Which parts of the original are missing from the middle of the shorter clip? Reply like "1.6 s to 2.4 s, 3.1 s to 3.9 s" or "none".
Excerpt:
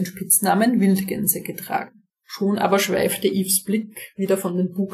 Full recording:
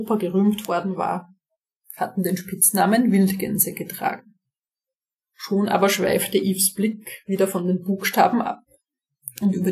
4.4 s to 5.2 s